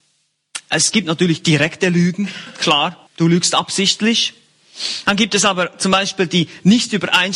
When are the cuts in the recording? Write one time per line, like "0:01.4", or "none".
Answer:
0:03.1